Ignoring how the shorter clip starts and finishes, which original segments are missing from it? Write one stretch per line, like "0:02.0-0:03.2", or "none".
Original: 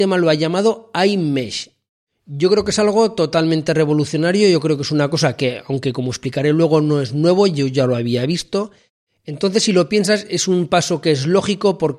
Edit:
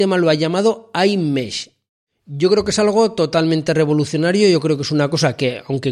none